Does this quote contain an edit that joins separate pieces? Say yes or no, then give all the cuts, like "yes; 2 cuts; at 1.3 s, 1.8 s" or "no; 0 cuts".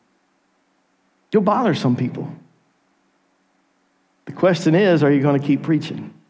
no; 0 cuts